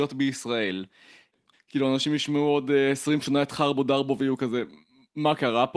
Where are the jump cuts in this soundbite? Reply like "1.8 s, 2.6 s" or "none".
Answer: 1.5 s